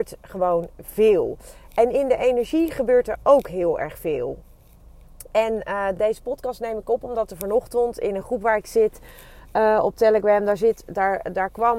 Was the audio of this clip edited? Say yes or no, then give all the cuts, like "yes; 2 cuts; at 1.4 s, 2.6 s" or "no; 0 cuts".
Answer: no; 0 cuts